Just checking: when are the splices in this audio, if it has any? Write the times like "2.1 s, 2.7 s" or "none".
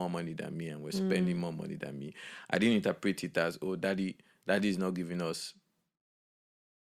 none